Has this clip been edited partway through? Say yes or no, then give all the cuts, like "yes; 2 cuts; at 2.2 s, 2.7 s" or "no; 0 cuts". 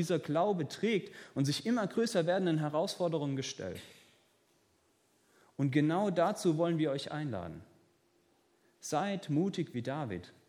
no; 0 cuts